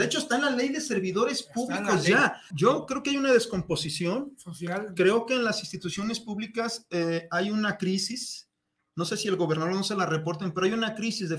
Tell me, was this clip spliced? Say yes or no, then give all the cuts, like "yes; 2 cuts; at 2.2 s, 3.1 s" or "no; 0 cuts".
yes; 1 cut; at 2.5 s